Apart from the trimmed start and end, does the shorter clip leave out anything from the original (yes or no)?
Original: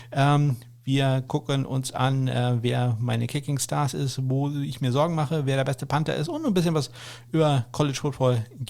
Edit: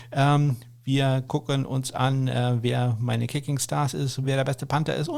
yes